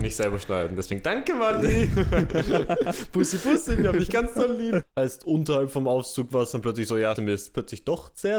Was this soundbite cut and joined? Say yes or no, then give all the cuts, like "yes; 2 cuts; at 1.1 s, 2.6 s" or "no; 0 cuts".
yes; 2 cuts; at 4.8 s, 7.2 s